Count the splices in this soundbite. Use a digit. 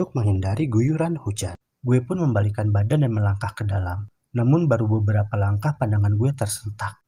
1